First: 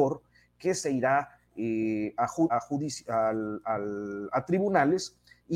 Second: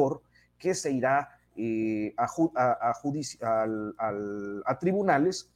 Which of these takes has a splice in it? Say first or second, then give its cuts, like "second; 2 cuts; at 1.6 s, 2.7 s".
first; 1 cut; at 2.5 s